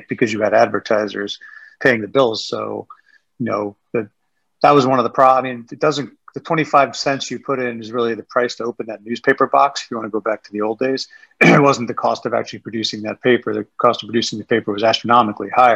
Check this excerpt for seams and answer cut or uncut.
uncut